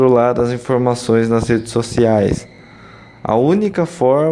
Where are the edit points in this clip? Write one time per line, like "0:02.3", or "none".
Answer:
none